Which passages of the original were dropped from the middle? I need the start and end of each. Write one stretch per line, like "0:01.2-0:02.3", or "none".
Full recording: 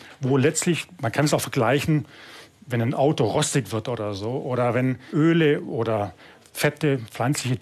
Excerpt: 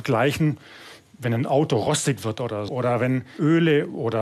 0:04.2-0:04.4